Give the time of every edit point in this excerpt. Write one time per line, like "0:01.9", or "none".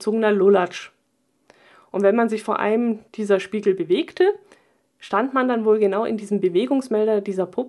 none

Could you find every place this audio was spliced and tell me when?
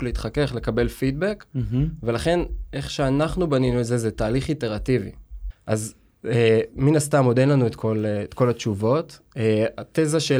0:05.5

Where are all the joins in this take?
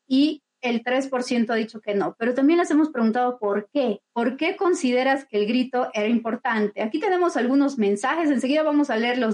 0:04.1

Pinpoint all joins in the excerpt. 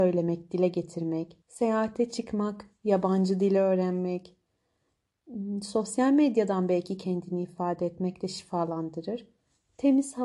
0:01.4

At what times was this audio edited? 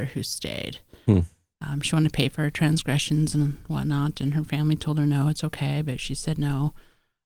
0:01.5

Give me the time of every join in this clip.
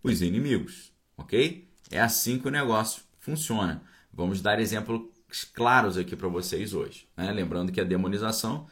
none

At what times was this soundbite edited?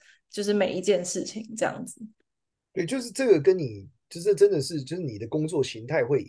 none

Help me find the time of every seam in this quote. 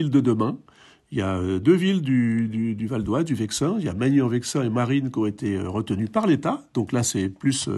none

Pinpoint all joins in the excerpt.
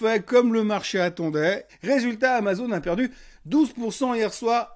0:01.7

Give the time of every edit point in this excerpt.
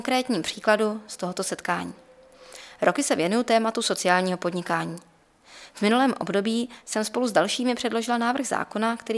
none

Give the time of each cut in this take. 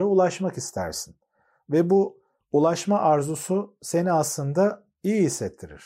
none

